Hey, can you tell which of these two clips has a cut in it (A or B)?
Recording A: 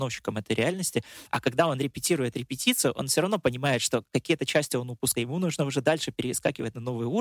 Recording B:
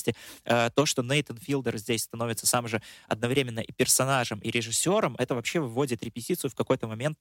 A